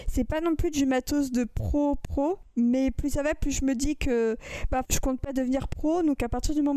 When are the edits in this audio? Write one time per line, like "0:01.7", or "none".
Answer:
0:04.8